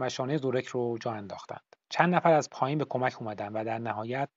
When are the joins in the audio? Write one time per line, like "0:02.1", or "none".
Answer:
0:01.8